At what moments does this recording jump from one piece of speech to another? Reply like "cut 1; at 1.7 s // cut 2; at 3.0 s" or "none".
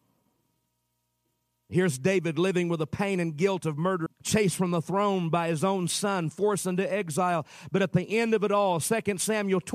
cut 1; at 4.1 s